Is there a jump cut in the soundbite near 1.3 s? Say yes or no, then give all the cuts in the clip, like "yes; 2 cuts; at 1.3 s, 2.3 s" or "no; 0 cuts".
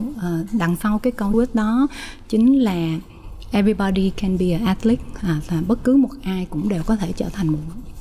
yes; 1 cut; at 1.3 s